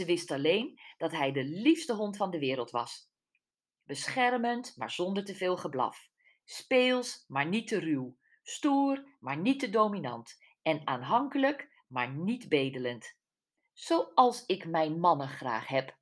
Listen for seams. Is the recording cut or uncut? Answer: uncut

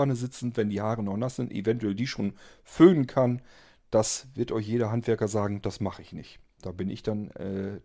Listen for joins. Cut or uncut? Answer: uncut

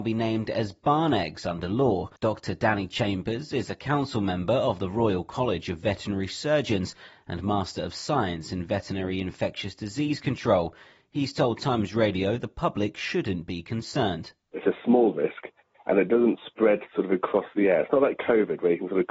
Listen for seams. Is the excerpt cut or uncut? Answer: cut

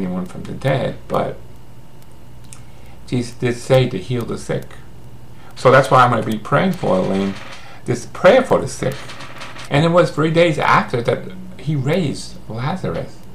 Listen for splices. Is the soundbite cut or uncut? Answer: cut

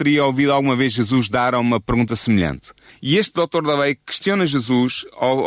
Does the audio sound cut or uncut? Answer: cut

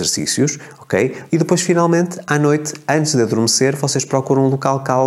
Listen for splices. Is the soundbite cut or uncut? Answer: cut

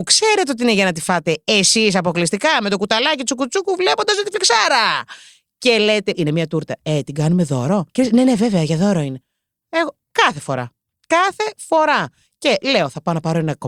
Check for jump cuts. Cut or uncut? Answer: cut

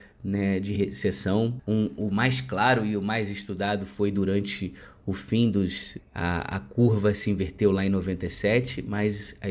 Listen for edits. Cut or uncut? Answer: cut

